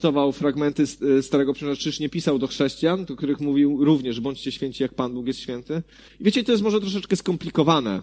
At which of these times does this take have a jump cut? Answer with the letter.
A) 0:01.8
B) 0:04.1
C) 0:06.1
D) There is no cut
C